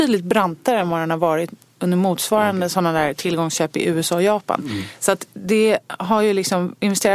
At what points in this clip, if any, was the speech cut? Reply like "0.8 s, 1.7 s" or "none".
none